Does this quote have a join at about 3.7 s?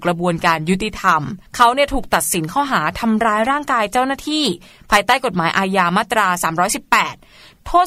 no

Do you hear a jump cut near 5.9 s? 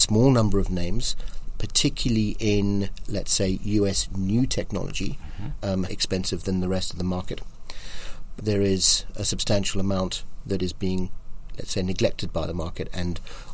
yes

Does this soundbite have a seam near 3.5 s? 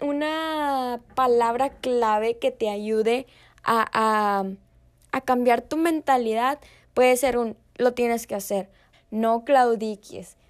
no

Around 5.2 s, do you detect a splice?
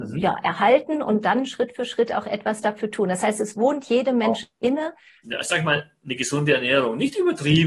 yes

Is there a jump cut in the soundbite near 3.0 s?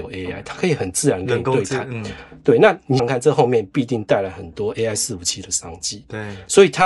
yes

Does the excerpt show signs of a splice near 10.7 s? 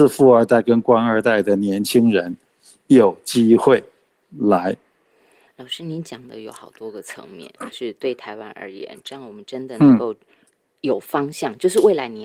no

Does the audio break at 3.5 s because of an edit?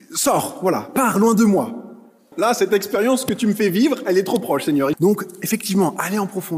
no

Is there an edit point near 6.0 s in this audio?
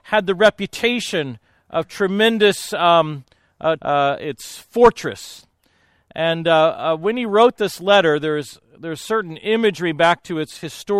no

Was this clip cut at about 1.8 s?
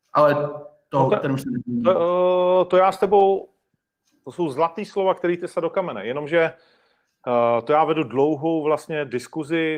no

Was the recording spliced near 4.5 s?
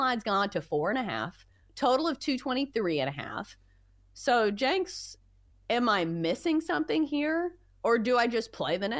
no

